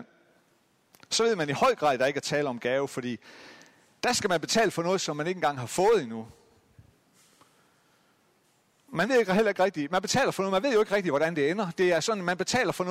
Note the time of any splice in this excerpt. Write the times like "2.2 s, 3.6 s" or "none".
none